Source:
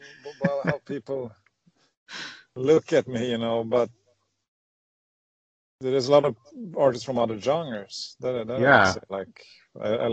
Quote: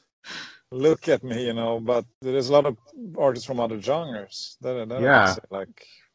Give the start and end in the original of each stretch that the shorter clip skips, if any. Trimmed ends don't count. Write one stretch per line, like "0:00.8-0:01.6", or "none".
0:03.9-0:05.7